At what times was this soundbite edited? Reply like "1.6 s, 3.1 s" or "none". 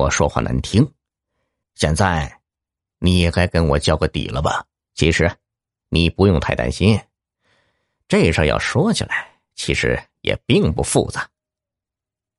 1.6 s, 4.8 s